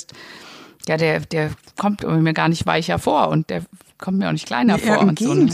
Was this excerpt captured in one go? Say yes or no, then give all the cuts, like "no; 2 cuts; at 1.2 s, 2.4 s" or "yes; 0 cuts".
yes; 0 cuts